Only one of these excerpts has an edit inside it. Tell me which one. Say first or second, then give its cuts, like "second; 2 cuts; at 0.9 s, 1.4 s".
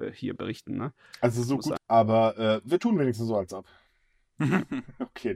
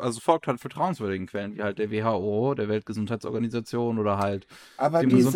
first; 1 cut; at 1.8 s